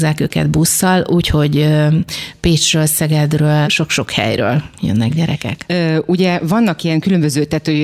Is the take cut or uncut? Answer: cut